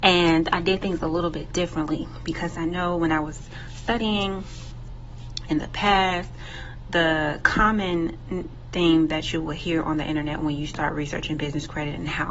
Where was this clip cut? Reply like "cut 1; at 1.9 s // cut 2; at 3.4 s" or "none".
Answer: none